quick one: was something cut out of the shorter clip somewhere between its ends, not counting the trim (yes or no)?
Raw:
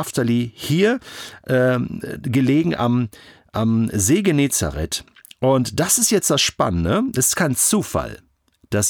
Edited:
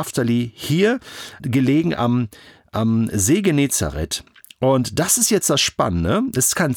yes